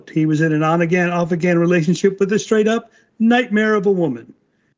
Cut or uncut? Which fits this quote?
uncut